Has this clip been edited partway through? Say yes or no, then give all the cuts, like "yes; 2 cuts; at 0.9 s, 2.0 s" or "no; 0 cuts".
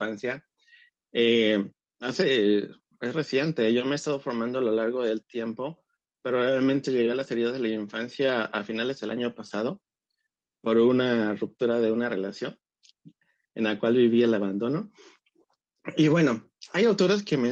no; 0 cuts